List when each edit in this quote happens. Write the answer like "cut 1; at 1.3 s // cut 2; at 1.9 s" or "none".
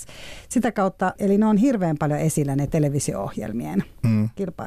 cut 1; at 1.2 s